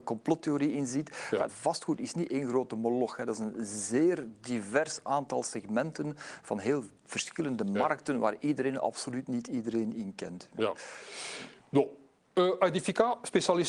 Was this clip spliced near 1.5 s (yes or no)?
yes